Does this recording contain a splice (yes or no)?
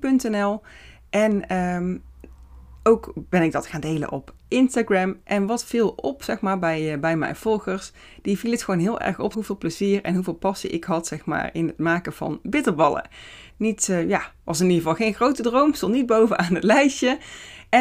yes